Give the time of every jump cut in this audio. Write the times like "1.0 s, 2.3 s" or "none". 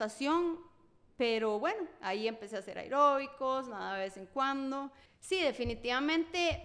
5.1 s